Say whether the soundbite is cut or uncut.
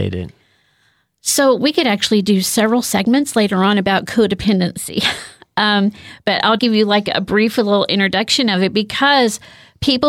cut